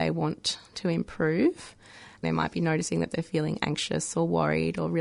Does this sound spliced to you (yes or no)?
yes